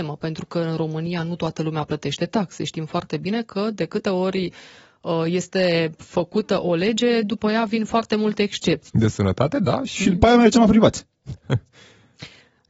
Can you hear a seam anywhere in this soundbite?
yes; 1 cut; at 8.9 s

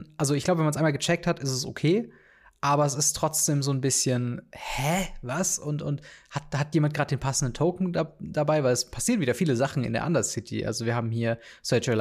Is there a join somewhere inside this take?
no; 0 cuts

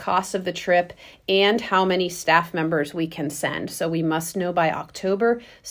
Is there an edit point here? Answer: no; 0 cuts

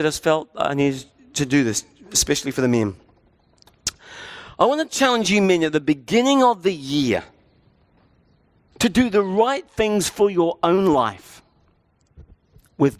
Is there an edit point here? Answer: no; 0 cuts

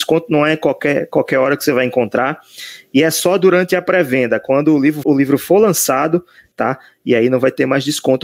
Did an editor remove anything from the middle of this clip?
yes; 2 cuts; at 5.0 s, 6.5 s

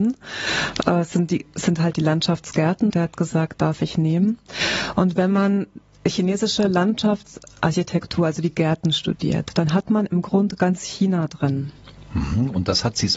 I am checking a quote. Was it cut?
yes; 1 cut; at 2.9 s

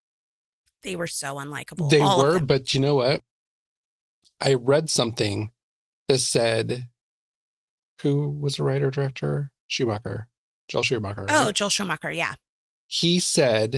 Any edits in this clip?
yes; 1 cut; at 9.6 s

